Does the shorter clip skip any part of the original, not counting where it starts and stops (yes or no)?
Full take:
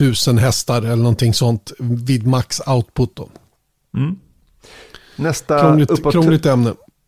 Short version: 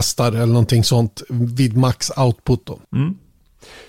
yes